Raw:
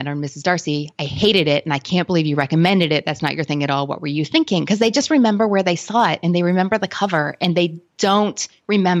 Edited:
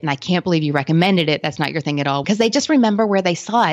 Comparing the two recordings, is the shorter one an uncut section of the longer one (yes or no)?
no